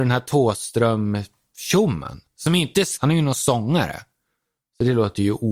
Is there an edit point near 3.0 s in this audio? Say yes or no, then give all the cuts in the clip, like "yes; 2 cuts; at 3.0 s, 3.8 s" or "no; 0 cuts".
yes; 1 cut; at 3.0 s